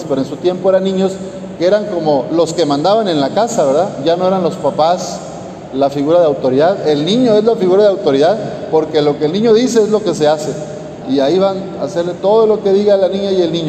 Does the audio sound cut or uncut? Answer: cut